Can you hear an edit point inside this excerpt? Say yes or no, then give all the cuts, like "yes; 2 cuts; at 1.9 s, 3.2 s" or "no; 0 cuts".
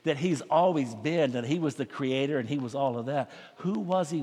no; 0 cuts